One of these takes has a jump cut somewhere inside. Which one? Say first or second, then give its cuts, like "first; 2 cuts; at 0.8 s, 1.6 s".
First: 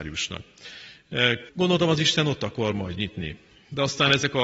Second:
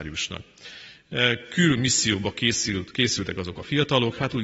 first; 1 cut; at 1.5 s